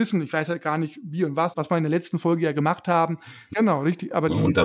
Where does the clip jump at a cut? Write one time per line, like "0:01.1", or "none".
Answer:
0:01.5
0:03.5